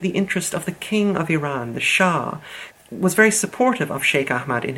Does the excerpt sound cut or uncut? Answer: cut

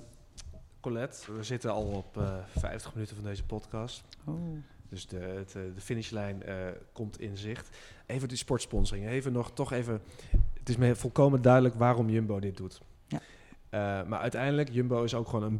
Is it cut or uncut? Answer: cut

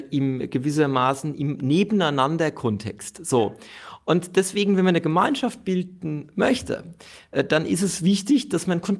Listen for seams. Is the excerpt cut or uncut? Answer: uncut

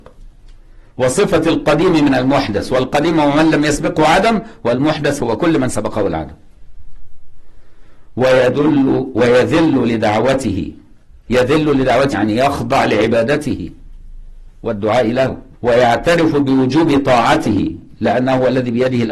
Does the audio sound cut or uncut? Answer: cut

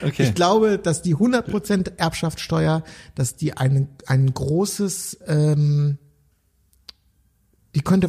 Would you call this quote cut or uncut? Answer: uncut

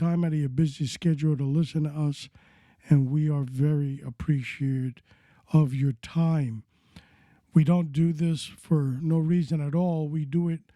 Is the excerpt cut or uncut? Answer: uncut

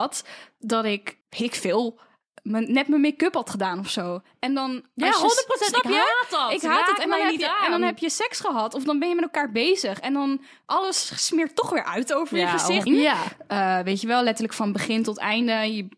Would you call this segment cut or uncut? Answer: cut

